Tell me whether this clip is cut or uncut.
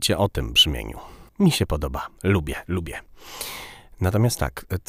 cut